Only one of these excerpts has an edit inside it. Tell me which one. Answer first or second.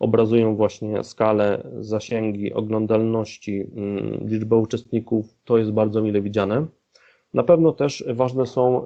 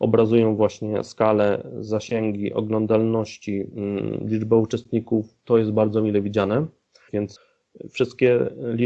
second